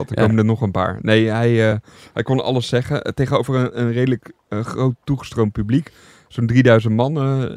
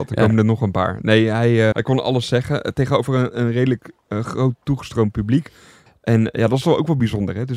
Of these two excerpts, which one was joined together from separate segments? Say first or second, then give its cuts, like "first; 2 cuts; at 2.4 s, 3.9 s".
second; 2 cuts; at 1.7 s, 5.9 s